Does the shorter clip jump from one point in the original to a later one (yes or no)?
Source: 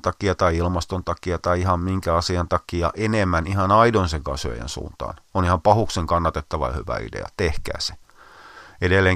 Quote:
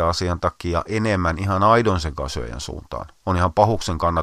no